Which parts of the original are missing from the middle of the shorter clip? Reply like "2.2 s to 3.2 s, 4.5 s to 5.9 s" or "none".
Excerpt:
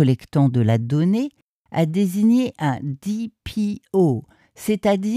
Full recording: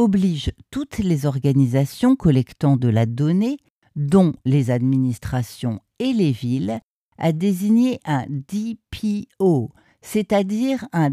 3.8 s to 7.0 s